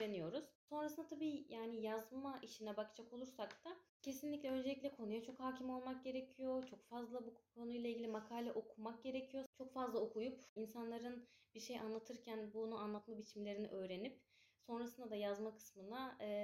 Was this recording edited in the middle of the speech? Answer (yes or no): yes